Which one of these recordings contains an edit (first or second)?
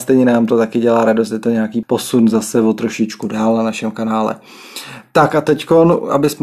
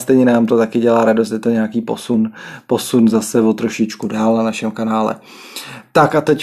first